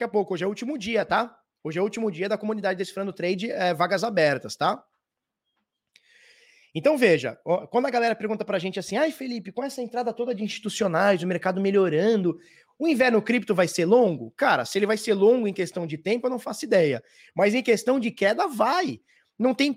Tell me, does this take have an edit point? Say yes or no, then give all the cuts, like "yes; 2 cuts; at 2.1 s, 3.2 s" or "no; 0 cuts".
no; 0 cuts